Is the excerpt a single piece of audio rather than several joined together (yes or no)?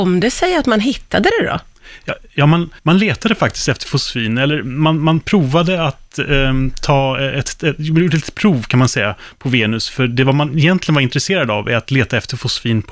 no